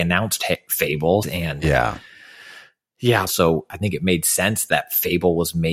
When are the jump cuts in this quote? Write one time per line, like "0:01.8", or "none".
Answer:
0:01.2
0:03.3